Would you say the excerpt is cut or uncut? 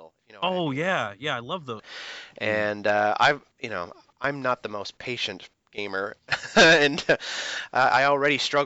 cut